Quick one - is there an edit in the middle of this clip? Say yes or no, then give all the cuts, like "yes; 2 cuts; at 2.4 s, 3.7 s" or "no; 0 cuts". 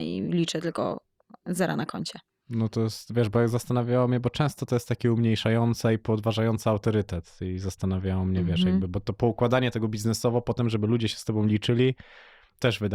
no; 0 cuts